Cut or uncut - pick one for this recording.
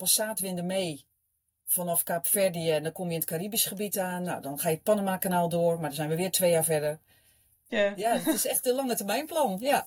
cut